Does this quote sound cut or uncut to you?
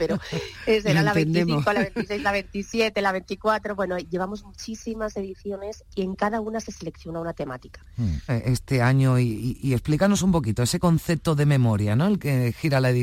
cut